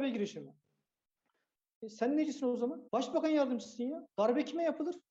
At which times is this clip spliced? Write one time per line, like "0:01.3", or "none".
0:02.9

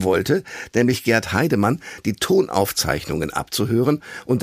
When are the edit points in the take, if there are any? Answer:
none

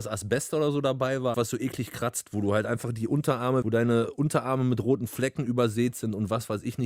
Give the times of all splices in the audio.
0:01.3
0:03.6

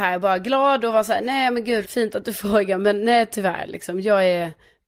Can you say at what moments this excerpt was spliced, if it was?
0:01.8

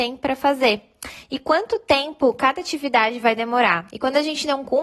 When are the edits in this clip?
0:03.9

